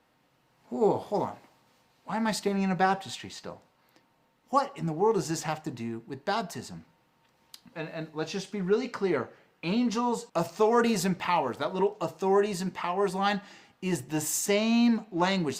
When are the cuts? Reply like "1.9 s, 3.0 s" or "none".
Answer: 7.7 s, 10.3 s